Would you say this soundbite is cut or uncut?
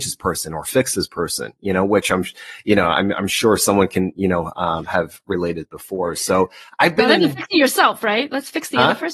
uncut